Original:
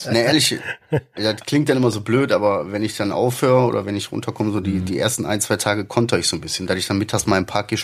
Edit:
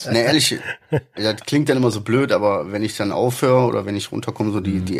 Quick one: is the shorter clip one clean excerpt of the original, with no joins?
yes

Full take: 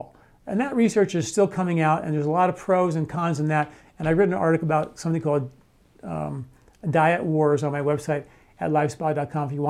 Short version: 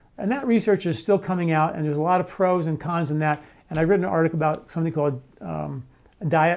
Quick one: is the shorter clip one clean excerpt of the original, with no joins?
no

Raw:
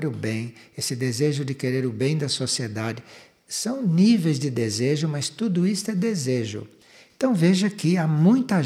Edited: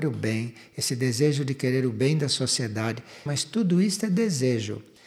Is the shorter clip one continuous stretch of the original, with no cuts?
no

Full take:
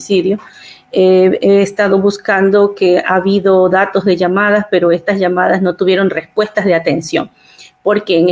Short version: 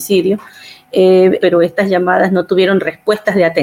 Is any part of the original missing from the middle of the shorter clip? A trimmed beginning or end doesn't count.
yes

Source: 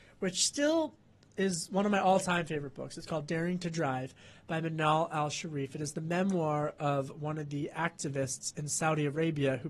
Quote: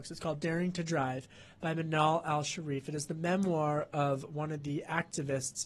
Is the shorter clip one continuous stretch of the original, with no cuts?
yes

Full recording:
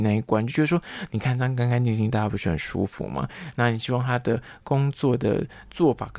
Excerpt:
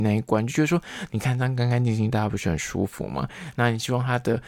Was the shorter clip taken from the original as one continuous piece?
yes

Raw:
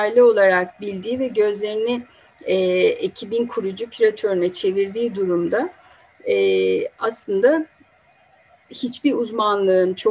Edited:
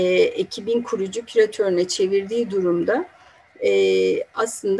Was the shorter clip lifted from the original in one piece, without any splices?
yes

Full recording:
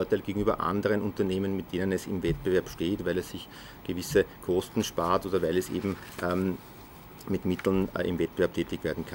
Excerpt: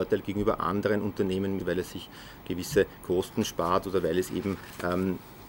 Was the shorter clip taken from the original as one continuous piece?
no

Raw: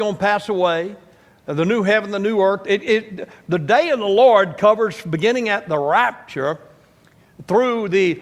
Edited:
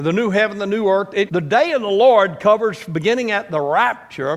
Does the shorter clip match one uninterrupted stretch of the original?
no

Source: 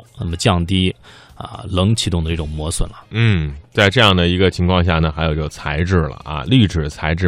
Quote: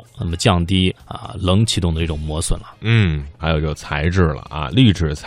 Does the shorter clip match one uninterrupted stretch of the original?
no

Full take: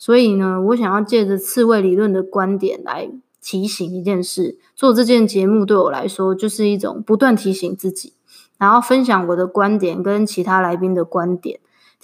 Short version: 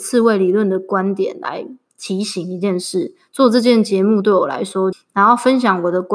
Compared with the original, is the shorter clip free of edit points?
no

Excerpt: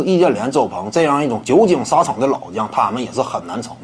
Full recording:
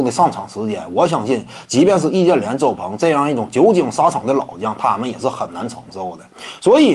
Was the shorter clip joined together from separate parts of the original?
no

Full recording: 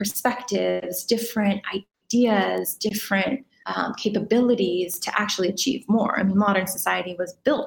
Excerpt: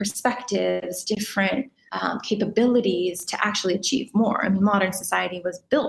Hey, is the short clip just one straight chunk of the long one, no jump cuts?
no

